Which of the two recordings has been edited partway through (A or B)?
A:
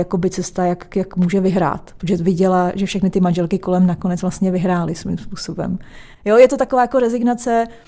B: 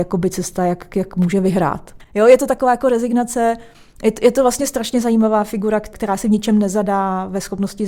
B